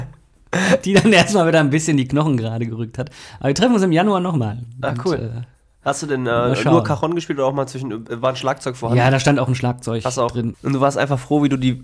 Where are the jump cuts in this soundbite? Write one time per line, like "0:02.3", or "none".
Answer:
0:10.5